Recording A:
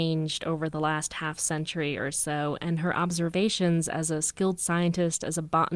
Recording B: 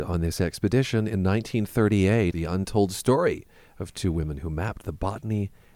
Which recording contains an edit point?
B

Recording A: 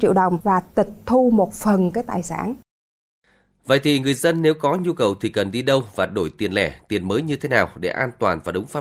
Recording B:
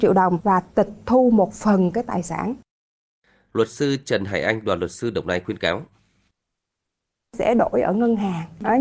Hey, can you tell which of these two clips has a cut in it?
B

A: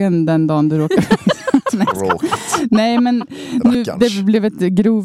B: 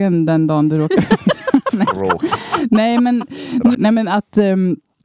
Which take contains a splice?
B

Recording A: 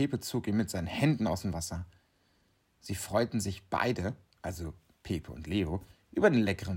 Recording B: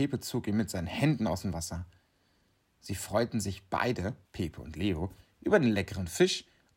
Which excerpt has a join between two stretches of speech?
B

